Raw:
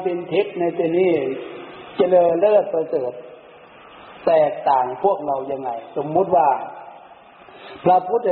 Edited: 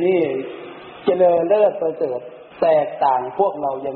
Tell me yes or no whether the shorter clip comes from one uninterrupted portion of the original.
no